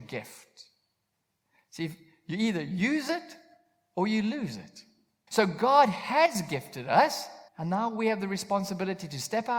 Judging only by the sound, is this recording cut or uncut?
cut